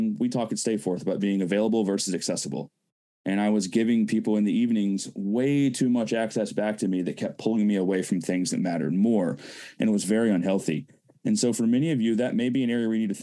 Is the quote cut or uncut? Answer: uncut